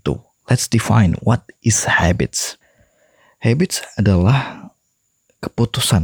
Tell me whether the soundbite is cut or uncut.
uncut